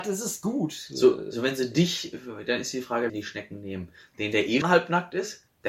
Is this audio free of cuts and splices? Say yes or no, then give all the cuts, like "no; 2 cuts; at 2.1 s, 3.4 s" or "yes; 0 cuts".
no; 2 cuts; at 3.1 s, 4.6 s